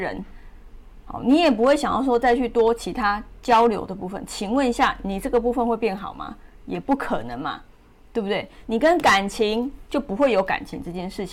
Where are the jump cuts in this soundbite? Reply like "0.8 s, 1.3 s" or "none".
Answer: 8.6 s, 9.9 s